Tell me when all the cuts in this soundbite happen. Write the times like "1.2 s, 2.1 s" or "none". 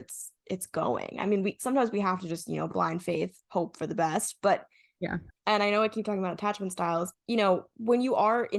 5.3 s, 7.1 s